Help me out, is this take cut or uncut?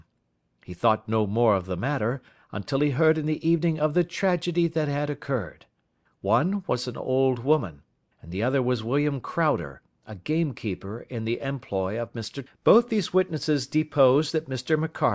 cut